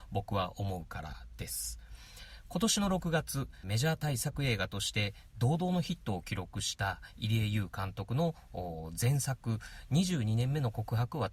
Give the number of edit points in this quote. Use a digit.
1